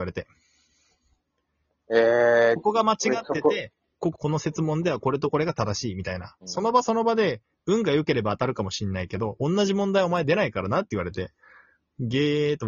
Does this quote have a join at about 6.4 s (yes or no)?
yes